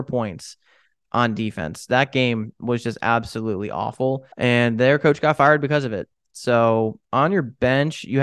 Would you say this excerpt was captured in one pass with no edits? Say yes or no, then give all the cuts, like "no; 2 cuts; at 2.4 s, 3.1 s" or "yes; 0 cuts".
no; 1 cut; at 4.3 s